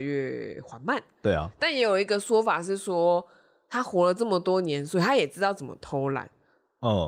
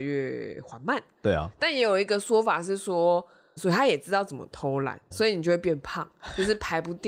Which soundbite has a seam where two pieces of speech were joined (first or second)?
second